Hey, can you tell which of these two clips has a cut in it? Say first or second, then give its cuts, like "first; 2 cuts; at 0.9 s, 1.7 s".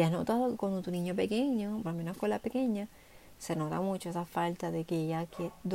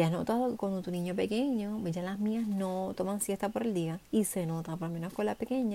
first; 1 cut; at 1.8 s